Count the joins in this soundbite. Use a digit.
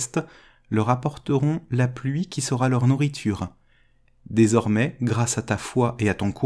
1